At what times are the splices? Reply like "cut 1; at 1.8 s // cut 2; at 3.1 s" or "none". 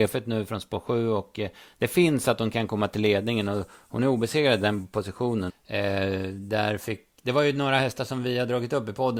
cut 1; at 5.5 s